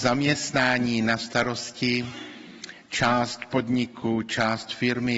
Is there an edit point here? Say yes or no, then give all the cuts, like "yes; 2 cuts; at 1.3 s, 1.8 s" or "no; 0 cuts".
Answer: no; 0 cuts